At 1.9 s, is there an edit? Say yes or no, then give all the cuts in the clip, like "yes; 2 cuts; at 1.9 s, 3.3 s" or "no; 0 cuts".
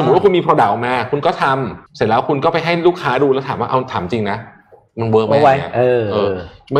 yes; 1 cut; at 1.9 s